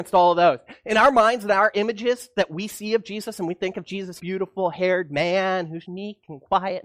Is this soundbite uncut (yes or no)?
no